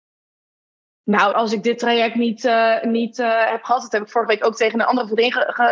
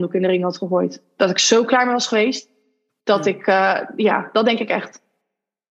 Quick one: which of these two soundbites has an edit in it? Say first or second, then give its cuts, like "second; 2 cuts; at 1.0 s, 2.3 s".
first; 1 cut; at 1.3 s